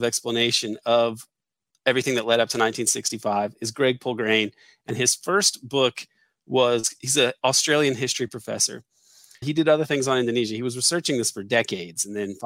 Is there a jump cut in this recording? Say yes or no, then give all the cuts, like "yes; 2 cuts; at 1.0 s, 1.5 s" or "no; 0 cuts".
yes; 1 cut; at 9.4 s